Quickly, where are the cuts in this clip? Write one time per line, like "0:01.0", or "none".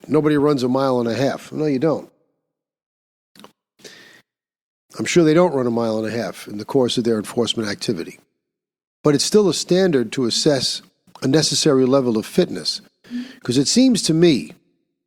none